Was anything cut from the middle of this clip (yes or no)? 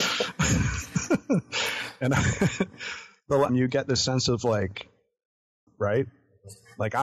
yes